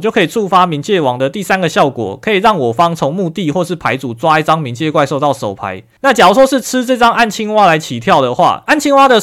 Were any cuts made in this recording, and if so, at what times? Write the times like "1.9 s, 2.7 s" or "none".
none